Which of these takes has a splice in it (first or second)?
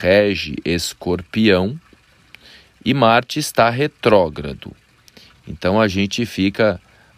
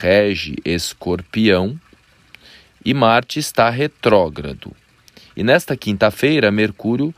first